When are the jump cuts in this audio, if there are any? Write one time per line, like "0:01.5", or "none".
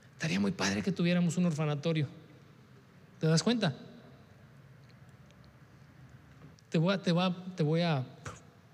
0:06.5